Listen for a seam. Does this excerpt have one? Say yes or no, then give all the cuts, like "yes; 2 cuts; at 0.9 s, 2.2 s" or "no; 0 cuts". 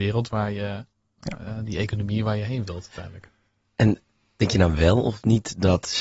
no; 0 cuts